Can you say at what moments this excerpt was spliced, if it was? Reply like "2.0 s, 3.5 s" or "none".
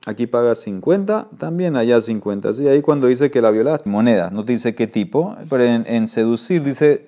3.9 s